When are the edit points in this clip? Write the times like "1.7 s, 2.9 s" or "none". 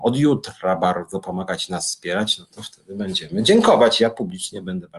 none